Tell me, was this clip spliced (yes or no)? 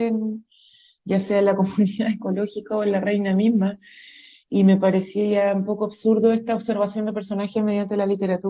no